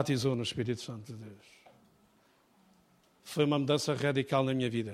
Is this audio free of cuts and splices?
yes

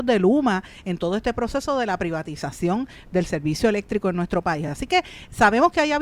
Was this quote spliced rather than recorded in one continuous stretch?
no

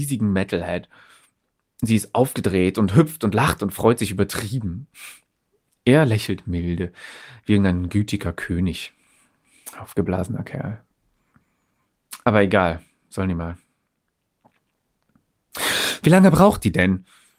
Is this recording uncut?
yes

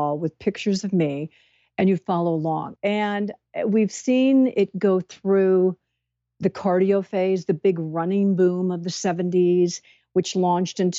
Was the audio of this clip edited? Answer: yes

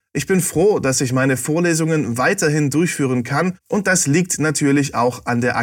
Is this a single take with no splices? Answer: yes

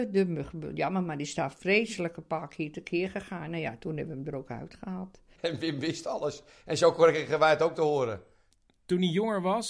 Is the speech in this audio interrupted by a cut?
yes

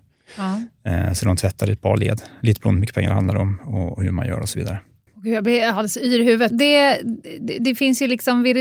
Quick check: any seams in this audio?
yes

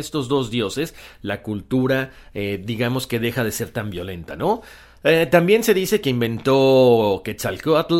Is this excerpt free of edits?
yes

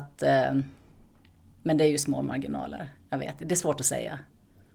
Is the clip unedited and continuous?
yes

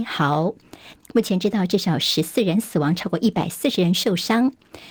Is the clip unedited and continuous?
no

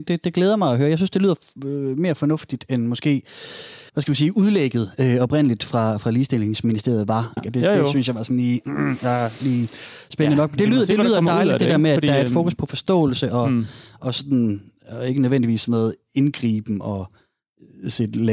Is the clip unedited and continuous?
no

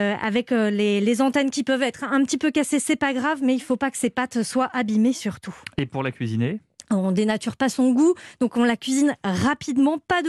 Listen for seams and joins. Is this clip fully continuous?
yes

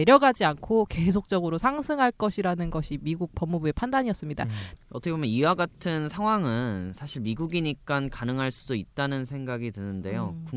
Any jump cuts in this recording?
yes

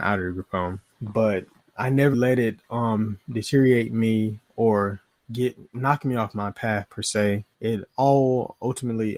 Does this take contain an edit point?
yes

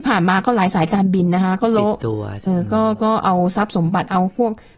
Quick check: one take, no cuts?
no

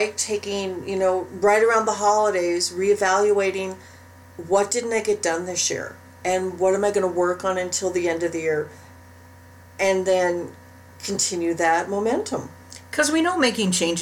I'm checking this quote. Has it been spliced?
no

